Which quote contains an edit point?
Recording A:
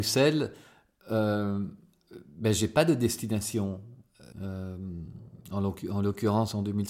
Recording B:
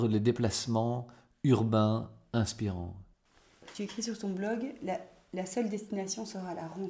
A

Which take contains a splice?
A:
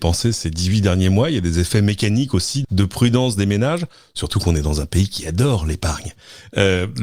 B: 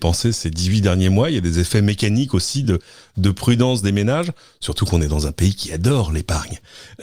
A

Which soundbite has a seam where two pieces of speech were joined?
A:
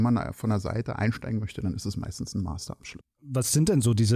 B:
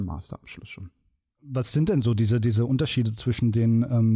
A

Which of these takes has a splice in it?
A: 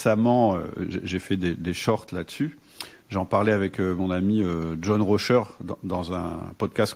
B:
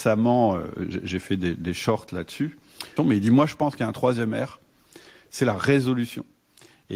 B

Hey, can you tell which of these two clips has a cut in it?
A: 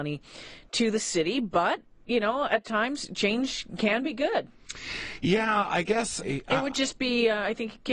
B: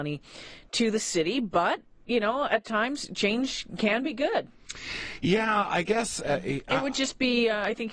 A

